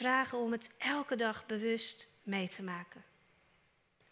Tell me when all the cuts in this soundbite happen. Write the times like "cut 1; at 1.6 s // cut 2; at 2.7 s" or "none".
none

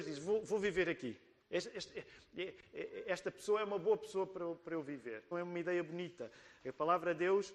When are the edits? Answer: cut 1; at 1.4 s // cut 2; at 5.3 s

